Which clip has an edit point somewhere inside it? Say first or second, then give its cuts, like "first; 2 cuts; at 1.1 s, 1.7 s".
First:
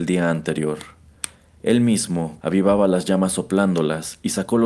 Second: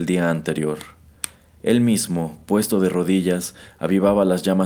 first; 1 cut; at 2.4 s